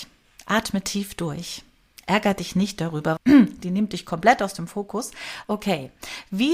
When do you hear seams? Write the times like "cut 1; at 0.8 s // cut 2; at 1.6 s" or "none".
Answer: cut 1; at 3.2 s // cut 2; at 5.4 s